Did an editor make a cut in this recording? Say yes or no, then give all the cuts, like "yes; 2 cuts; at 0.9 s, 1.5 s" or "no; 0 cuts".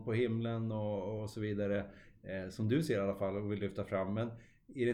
no; 0 cuts